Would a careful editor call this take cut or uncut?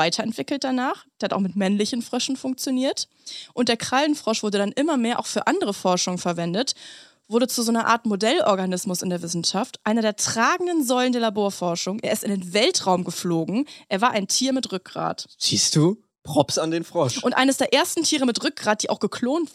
uncut